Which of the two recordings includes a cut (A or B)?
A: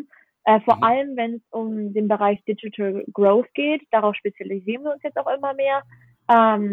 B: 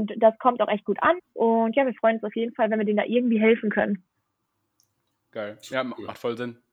B